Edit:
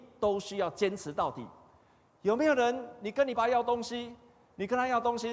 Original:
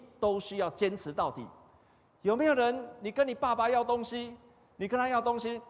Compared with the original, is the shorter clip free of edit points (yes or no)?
no